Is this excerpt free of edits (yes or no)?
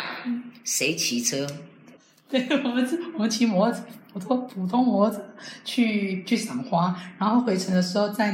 no